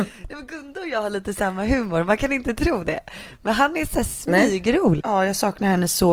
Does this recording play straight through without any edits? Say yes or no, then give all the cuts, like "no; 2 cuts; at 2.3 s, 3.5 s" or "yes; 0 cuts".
no; 1 cut; at 5.0 s